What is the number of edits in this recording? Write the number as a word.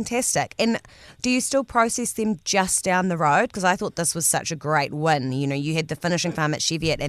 zero